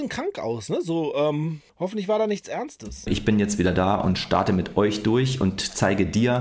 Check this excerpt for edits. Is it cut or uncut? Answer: cut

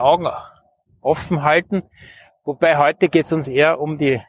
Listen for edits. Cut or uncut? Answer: uncut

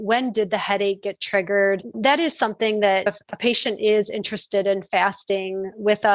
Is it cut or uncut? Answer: cut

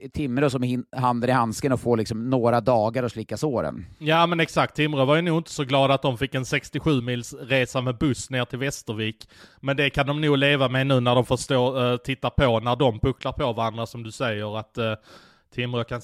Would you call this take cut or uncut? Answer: uncut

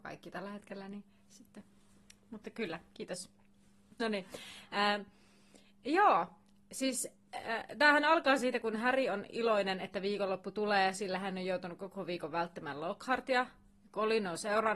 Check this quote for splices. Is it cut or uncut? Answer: uncut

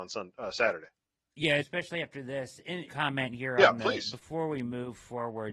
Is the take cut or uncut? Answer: cut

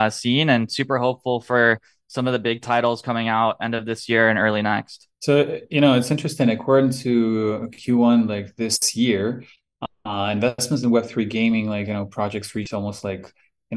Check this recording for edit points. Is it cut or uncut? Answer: uncut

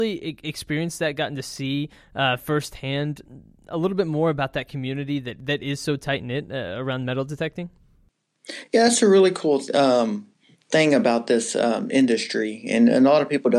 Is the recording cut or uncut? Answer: uncut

